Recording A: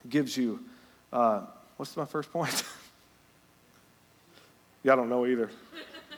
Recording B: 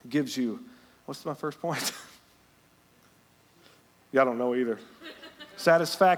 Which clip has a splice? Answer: B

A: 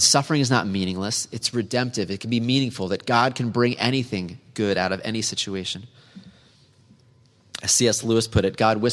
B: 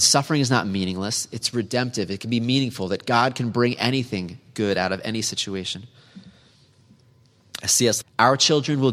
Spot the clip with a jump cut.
B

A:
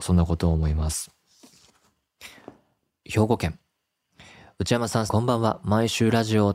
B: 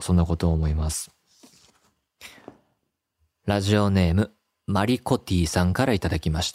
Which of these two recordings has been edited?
A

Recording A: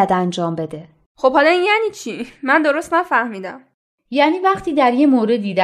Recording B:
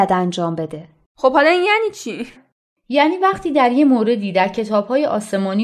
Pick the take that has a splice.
B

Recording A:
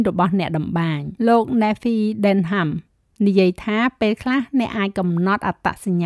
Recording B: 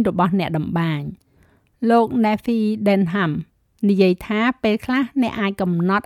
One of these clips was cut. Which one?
A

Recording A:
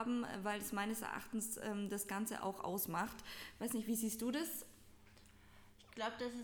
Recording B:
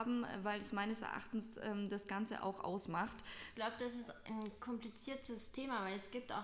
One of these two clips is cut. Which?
B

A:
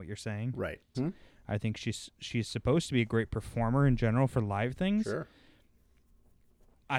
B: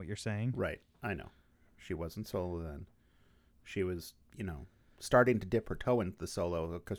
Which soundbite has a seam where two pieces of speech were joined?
A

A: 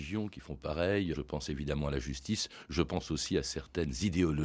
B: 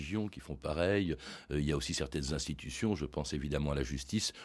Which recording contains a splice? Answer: A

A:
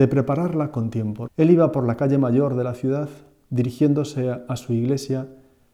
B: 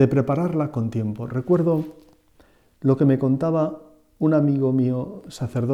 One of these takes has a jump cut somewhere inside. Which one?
A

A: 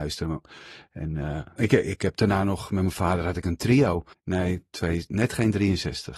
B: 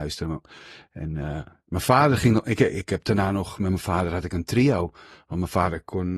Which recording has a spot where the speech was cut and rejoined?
A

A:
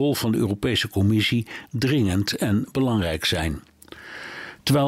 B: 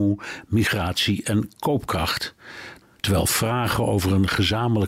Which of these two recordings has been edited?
B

